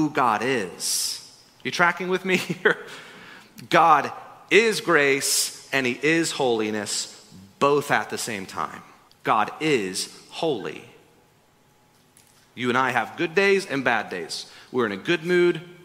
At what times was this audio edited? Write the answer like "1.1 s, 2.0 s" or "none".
9.1 s